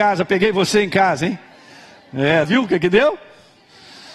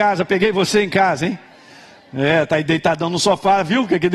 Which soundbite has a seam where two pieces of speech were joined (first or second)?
first